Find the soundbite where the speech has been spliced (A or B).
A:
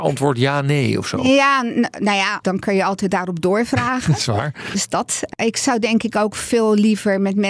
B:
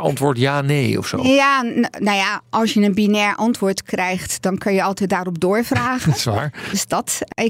A